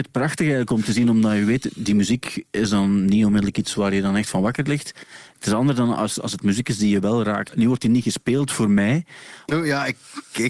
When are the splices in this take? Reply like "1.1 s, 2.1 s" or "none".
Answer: 7.5 s, 9.5 s